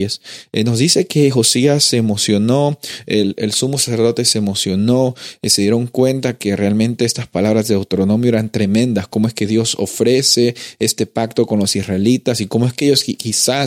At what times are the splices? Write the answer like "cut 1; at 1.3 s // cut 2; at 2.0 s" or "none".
none